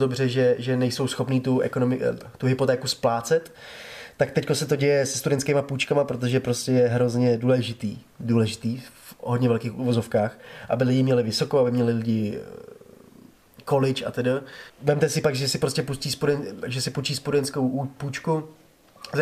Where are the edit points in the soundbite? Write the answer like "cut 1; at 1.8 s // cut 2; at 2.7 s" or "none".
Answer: cut 1; at 14.7 s